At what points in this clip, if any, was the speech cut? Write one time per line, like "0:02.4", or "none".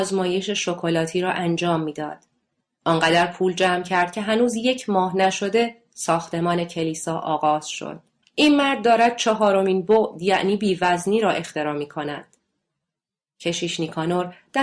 0:08.2

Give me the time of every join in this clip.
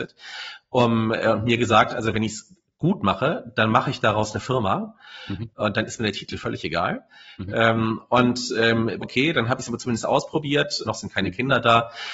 0:09.0
0:10.9

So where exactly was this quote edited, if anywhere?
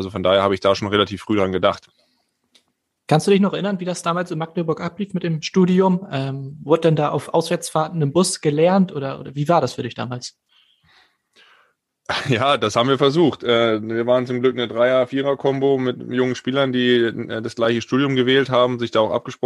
none

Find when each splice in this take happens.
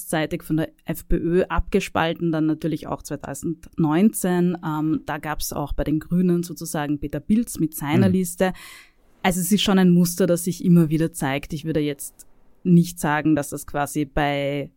none

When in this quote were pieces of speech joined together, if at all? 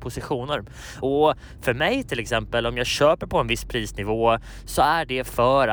none

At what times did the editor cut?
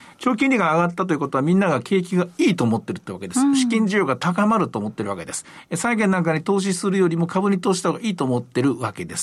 none

